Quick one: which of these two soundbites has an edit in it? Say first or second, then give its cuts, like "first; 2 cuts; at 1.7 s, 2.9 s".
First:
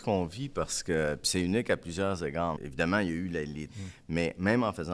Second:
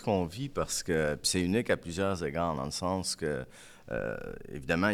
first; 2 cuts; at 2.6 s, 3.7 s